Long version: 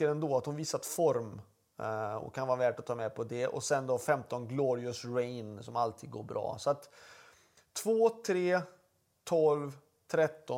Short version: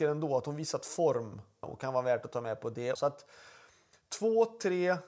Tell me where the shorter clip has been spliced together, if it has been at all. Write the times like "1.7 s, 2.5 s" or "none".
1.6 s, 3.0 s